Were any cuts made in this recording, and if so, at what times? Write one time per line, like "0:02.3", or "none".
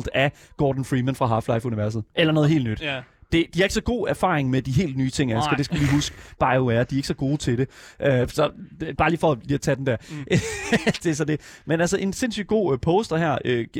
0:02.1